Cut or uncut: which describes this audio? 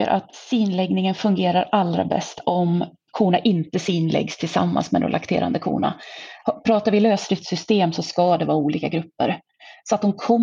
cut